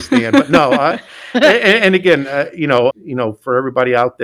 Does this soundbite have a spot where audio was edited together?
yes; 1 cut; at 2.9 s

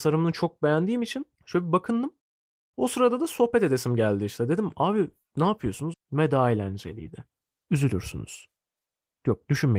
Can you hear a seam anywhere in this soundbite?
yes; 2 cuts; at 5.9 s, 7.6 s

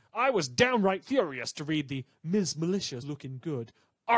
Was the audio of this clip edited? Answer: yes; 1 cut; at 3.0 s

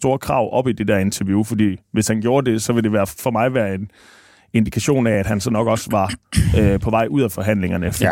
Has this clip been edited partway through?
no; 0 cuts

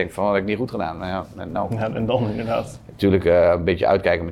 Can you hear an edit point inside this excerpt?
no; 0 cuts

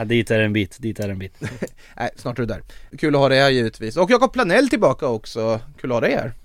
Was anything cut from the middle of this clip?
no; 0 cuts

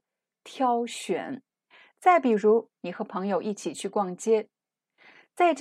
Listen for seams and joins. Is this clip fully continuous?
no; 2 cuts; at 1.5 s, 2.7 s

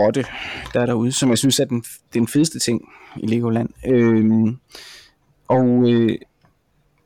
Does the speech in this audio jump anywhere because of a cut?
no; 0 cuts

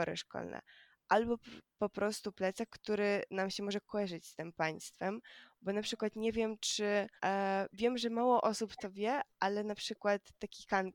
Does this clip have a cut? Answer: yes; 1 cut; at 7.2 s

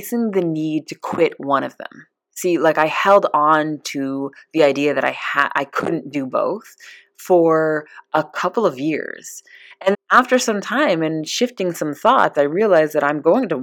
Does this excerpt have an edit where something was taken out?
yes; 1 cut; at 9.9 s

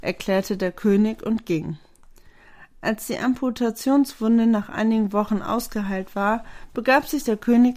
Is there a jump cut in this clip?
no; 0 cuts

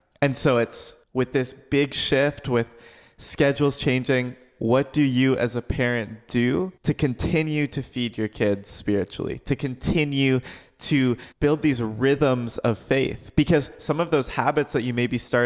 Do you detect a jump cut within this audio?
yes; 3 cuts; at 1.0 s, 6.8 s, 11.3 s

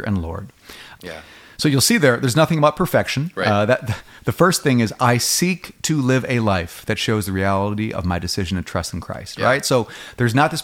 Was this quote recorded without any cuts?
no; 1 cut; at 1.0 s

